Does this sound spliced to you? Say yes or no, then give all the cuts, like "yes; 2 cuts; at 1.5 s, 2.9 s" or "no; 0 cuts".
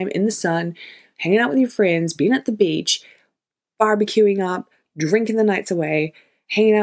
no; 0 cuts